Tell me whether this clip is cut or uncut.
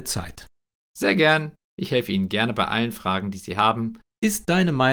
cut